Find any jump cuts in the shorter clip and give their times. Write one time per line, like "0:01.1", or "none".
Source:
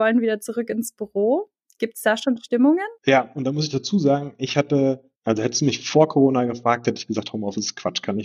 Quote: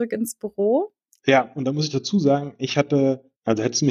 0:01.2